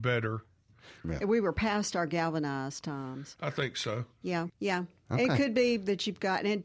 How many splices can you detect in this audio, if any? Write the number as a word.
two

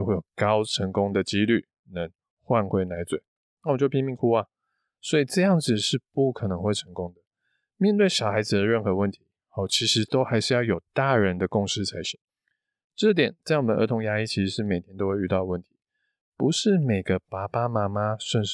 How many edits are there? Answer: zero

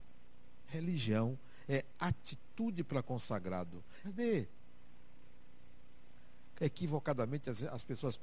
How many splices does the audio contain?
two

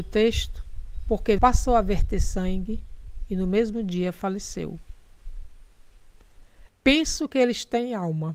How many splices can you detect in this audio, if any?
two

